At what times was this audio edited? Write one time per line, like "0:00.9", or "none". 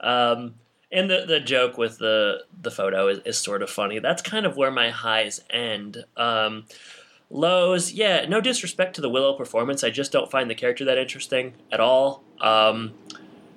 none